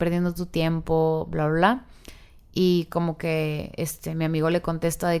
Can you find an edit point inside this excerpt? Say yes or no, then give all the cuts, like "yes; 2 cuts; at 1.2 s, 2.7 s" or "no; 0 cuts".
no; 0 cuts